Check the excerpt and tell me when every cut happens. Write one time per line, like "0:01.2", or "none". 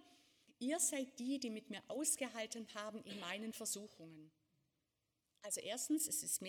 none

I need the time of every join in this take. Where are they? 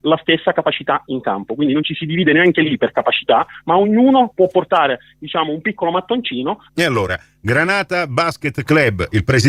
0:06.7

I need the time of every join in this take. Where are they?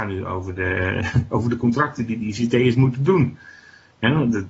none

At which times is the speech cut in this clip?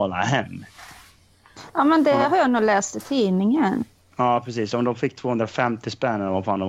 none

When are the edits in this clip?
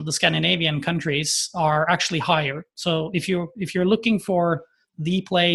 none

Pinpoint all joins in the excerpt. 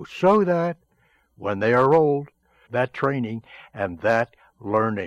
0:02.7

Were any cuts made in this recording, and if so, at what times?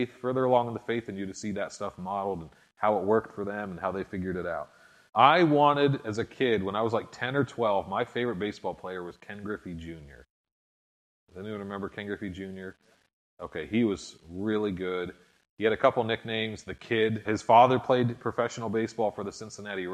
0:05.1
0:17.2

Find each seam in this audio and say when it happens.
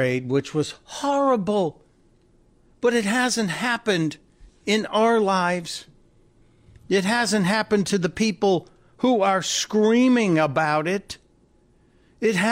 none

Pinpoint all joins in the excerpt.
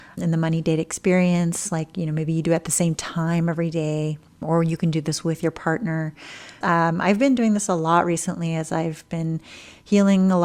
0:06.6

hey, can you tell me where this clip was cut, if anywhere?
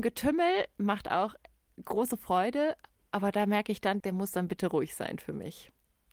0:04.0

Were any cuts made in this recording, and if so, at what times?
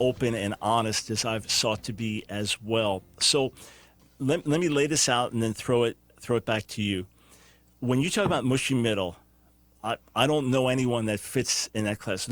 none

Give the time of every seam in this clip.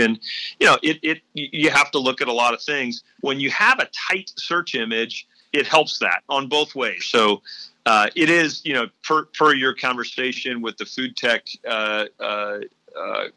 0:07.0

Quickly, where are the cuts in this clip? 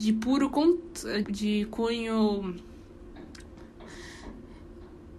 0:01.2

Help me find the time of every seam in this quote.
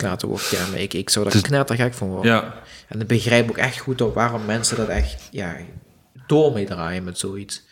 none

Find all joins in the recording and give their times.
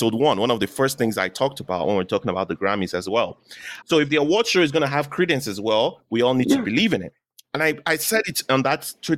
0:03.8

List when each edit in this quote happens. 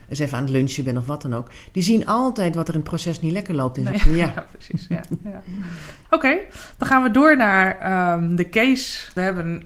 0:03.9

